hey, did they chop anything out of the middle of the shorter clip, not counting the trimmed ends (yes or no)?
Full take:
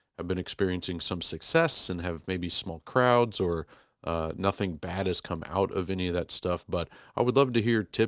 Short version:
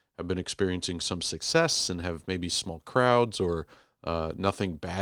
no